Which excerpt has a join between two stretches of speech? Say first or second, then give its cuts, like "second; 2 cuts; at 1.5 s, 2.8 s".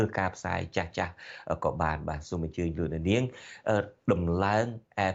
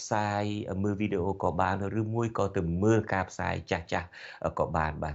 first; 1 cut; at 4.0 s